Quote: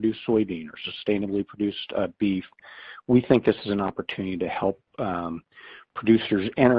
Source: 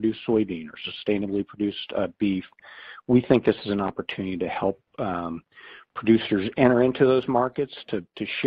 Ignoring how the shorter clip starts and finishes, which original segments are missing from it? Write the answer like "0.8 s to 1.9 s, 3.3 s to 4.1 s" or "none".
none